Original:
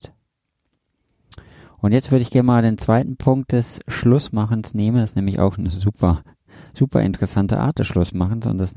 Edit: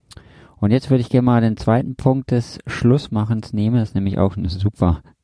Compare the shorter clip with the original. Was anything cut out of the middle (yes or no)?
no